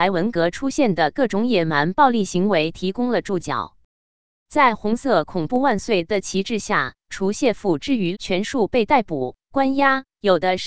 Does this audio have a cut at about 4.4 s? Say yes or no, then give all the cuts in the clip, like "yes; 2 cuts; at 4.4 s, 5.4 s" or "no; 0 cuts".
no; 2 cuts; at 7.0 s, 8.1 s